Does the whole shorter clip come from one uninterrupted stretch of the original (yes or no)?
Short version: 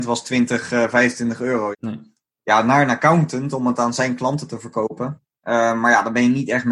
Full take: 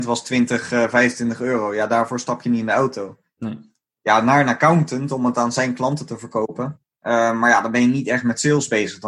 no